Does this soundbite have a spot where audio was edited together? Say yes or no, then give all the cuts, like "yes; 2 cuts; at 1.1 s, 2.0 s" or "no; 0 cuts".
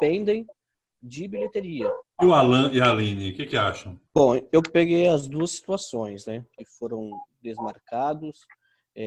yes; 3 cuts; at 2.1 s, 4.1 s, 6.6 s